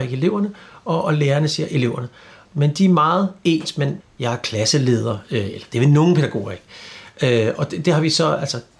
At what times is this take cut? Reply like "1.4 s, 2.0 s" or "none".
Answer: 2.4 s, 4.0 s